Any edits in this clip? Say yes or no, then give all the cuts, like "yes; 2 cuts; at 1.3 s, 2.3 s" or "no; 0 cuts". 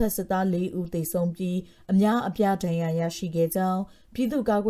no; 0 cuts